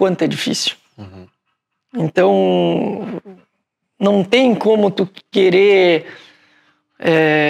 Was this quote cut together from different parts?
no; 0 cuts

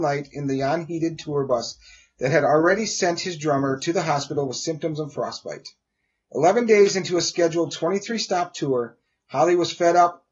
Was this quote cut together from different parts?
no; 0 cuts

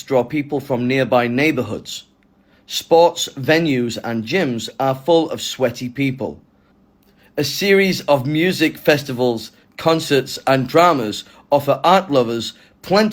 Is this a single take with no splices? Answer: yes; 0 cuts

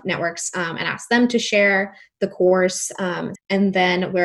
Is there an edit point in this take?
yes; 1 cut; at 3.4 s

